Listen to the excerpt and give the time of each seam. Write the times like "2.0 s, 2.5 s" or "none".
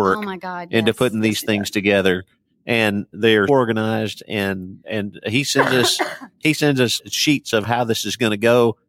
3.5 s, 7.0 s